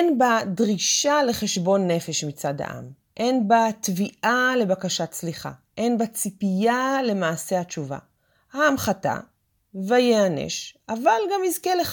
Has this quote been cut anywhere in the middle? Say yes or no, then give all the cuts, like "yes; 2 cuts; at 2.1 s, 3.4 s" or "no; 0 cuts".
no; 0 cuts